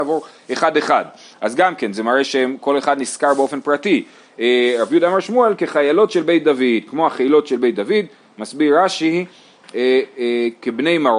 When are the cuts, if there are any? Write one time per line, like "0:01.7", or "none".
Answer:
none

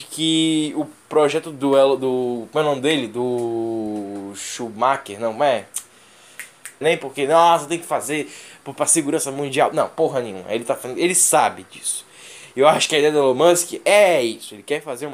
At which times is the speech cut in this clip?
0:06.8

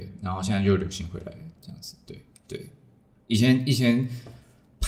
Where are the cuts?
0:02.3

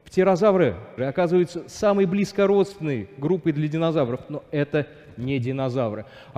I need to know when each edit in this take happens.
0:01.0

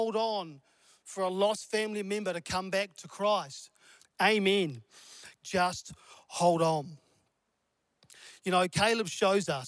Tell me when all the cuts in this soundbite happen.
0:04.0
0:05.4

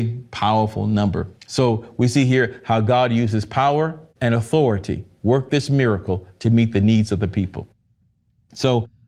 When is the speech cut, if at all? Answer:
0:01.4
0:04.1

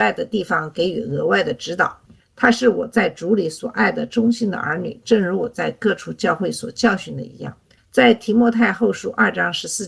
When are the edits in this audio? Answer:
0:02.1
0:05.0

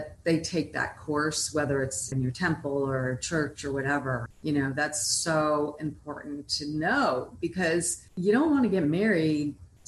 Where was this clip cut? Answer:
0:02.1
0:04.3
0:08.1

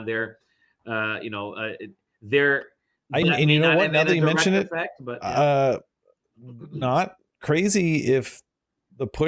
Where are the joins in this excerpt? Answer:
0:03.2

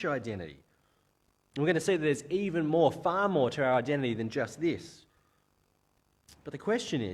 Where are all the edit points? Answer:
none

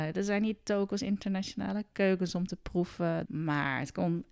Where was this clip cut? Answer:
0:03.2

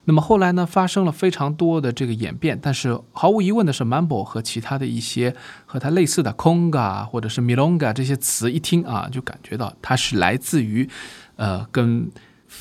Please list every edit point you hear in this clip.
none

